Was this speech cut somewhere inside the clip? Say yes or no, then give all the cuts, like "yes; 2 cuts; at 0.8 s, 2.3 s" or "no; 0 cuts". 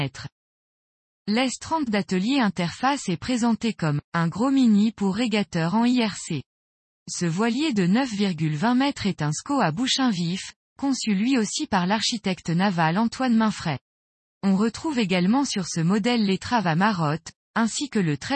yes; 1 cut; at 10.6 s